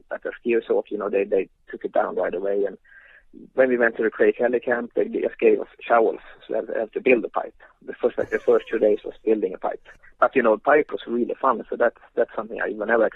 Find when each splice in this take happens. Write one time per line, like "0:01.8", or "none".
none